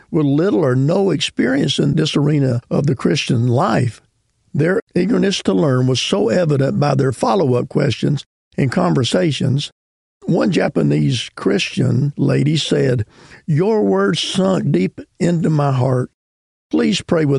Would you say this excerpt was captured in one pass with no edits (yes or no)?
yes